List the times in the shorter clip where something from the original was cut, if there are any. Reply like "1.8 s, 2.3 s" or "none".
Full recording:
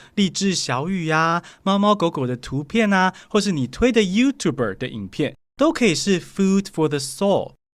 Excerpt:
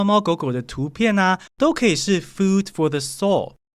1.5 s